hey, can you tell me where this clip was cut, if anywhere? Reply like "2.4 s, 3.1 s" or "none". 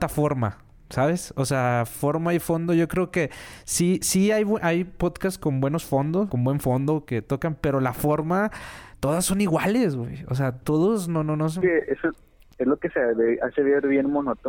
6.3 s